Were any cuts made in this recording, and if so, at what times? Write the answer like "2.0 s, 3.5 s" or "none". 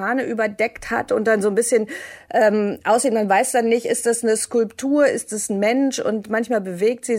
none